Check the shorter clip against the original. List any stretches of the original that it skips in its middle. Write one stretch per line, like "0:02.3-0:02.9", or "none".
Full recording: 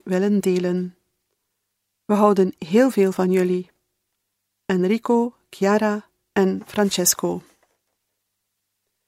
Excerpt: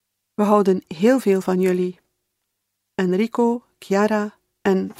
none